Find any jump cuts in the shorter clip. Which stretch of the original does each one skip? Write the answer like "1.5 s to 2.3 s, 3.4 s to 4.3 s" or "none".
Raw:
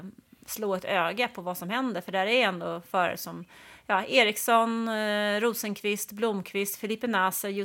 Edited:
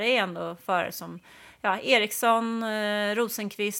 none